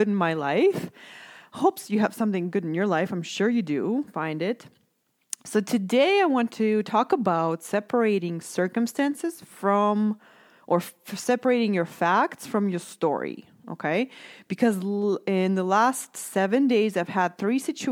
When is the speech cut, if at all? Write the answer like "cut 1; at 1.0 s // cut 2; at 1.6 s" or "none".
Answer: none